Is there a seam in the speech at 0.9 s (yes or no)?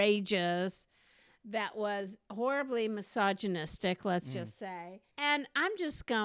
no